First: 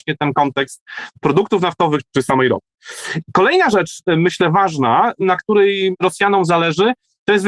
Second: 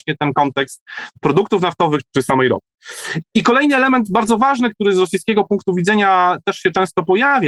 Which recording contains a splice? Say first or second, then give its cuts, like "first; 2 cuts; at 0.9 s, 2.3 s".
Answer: second; 1 cut; at 3.2 s